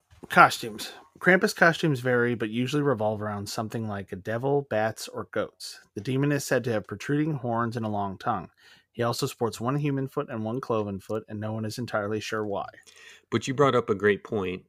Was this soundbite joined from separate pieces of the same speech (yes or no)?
no